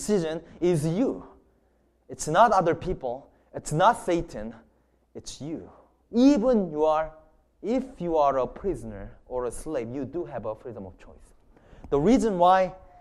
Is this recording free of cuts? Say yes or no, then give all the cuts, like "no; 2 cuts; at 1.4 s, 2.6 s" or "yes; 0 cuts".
no; 1 cut; at 6.0 s